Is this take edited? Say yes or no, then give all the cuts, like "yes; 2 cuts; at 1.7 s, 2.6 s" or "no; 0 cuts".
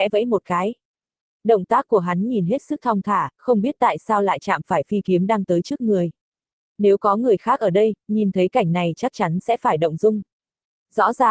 yes; 1 cut; at 3.3 s